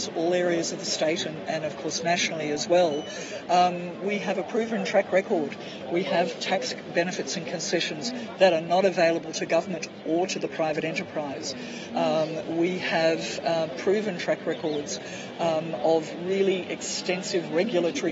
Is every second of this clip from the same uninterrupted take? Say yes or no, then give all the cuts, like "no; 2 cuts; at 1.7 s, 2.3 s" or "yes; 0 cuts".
yes; 0 cuts